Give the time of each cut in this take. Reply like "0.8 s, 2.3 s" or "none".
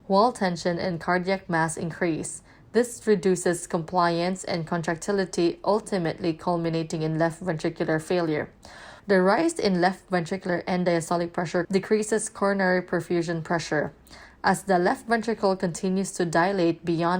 9.0 s, 11.6 s